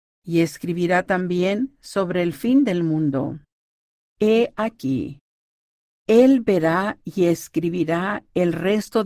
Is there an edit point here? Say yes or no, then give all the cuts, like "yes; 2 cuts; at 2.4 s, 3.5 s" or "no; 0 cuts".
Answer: yes; 1 cut; at 4.1 s